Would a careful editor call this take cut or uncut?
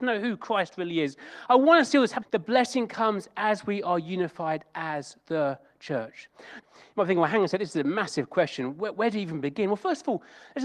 cut